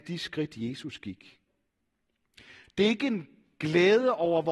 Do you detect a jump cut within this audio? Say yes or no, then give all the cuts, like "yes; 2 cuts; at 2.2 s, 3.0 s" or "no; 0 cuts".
no; 0 cuts